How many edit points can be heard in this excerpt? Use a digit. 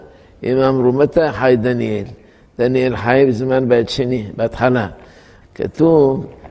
1